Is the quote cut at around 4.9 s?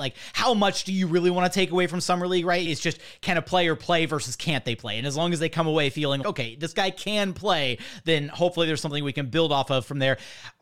no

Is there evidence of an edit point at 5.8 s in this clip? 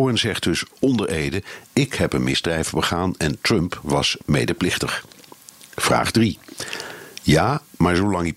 no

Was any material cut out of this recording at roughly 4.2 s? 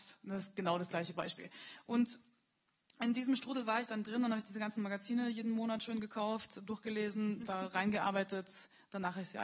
no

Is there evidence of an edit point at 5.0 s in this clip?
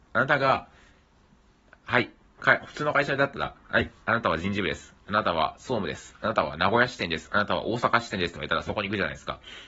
no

